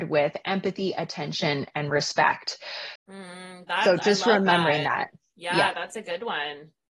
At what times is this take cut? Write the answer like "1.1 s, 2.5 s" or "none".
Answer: 3.0 s